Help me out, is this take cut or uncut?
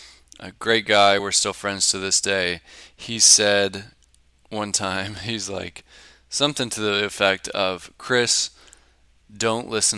uncut